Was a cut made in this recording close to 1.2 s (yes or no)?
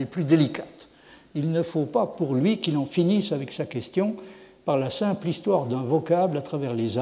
no